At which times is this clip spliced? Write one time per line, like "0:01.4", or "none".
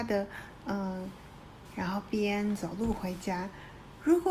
0:01.7